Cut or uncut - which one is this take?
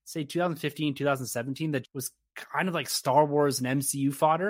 cut